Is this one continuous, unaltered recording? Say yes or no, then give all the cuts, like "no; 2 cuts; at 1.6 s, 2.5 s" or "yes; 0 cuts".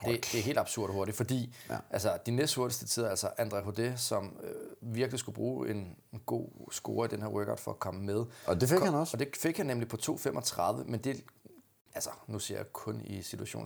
yes; 0 cuts